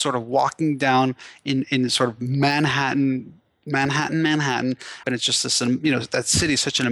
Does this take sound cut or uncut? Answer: cut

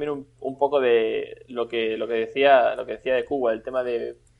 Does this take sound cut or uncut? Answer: uncut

